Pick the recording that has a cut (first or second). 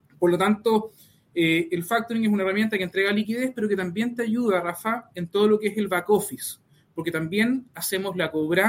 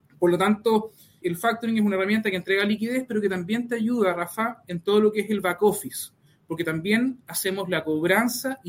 second